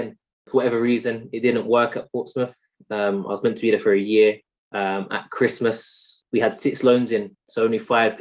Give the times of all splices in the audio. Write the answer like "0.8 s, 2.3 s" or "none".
none